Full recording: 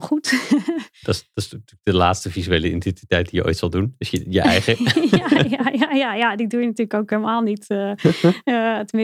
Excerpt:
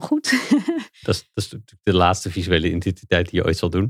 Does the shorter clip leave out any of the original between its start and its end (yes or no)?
no